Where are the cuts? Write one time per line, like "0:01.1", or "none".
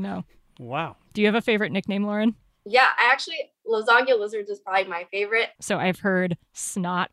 0:05.6